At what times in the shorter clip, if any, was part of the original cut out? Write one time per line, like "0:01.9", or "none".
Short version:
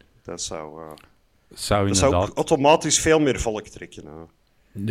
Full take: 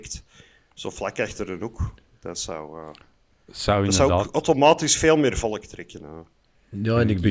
none